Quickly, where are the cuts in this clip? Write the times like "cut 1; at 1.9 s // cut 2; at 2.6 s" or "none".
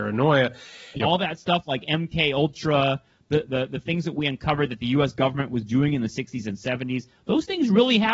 cut 1; at 0.9 s